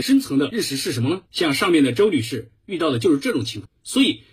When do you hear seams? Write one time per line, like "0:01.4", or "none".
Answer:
0:01.3

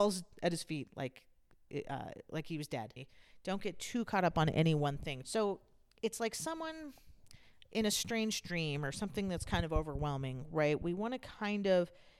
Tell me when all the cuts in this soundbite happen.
0:03.0
0:05.2

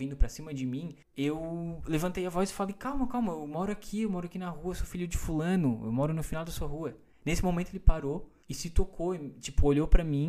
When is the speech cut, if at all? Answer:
none

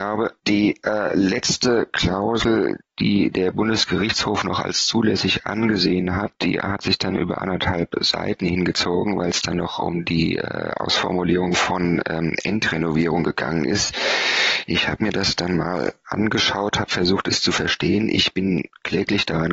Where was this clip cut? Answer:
none

